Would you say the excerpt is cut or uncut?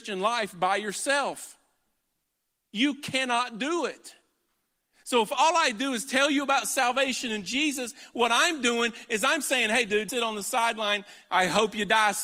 cut